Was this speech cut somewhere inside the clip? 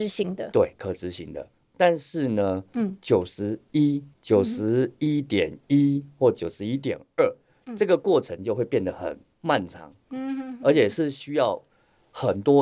yes; 1 cut; at 2.7 s

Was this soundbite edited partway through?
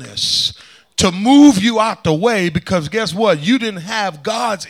no; 0 cuts

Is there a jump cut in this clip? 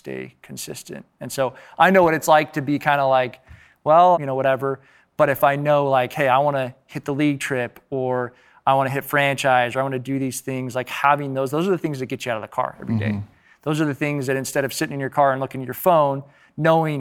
yes; 1 cut; at 4.1 s

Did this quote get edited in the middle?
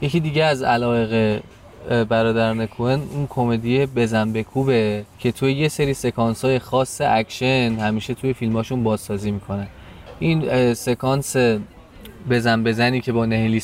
yes; 1 cut; at 5.1 s

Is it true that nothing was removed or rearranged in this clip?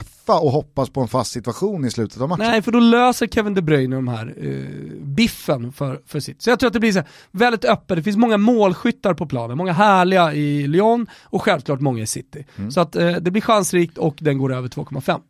yes; 0 cuts

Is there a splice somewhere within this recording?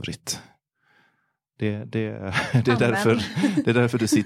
no; 0 cuts

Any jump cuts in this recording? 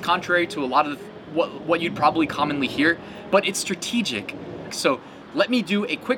yes; 1 cut; at 4.7 s

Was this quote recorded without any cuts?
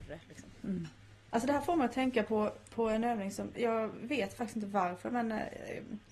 no; 2 cuts; at 1.3 s, 3.5 s

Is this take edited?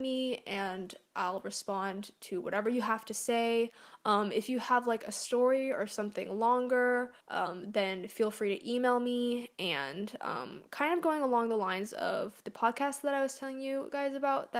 yes; 1 cut; at 7.2 s

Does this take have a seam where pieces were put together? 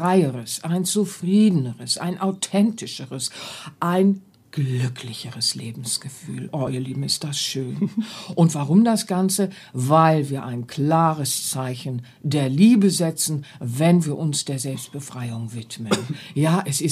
no; 0 cuts

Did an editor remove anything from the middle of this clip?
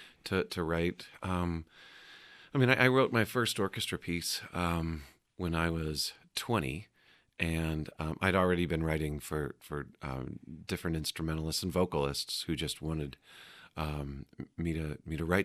no; 0 cuts

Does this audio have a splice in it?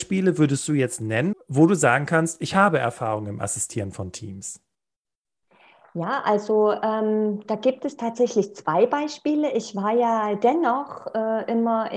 yes; 1 cut; at 1.3 s

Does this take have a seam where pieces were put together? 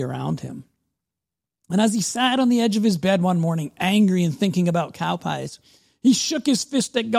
no; 0 cuts

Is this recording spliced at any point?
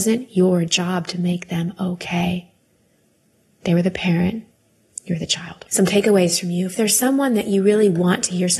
yes; 1 cut; at 5.7 s

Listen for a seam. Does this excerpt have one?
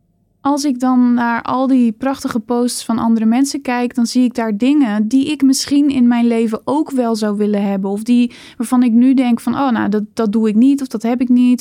no; 0 cuts

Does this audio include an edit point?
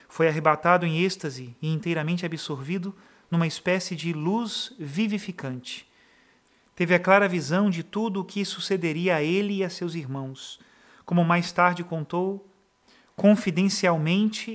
no; 0 cuts

